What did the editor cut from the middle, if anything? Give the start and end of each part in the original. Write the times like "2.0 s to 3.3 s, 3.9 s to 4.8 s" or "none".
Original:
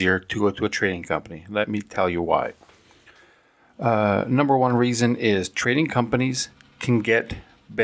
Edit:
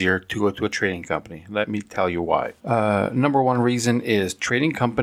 2.6 s to 3.7 s